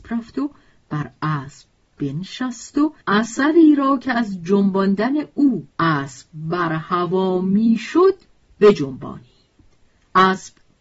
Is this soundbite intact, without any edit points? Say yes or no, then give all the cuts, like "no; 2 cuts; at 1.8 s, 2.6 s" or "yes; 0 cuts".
no; 2 cuts; at 3.0 s, 5.7 s